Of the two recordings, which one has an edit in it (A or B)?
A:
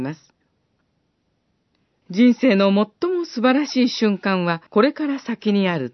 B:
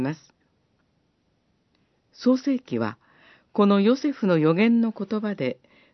A